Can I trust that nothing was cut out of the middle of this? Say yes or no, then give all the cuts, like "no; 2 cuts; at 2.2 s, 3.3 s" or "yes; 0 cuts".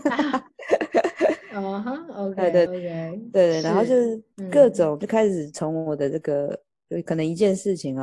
no; 1 cut; at 2.7 s